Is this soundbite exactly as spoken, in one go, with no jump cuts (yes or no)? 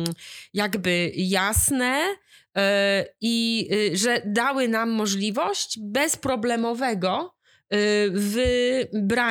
yes